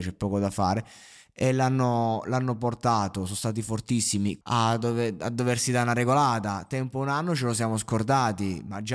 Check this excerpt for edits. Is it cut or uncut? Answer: cut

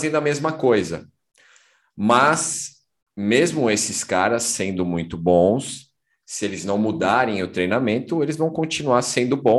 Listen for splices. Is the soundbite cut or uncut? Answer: uncut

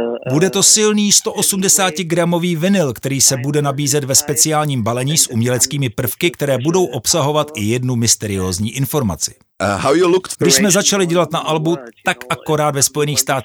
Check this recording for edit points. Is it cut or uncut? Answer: cut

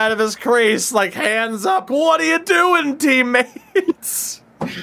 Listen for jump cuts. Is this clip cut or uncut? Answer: cut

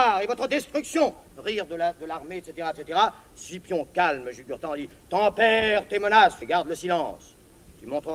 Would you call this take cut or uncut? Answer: cut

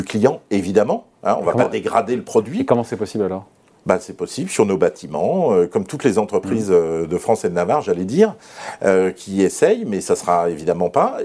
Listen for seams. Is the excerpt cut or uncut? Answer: uncut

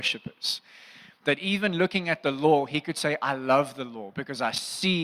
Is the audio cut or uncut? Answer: uncut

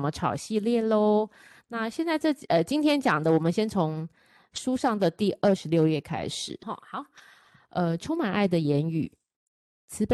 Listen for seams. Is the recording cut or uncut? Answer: cut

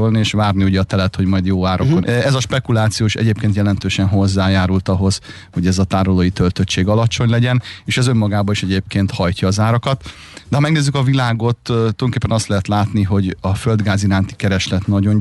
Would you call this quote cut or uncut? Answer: cut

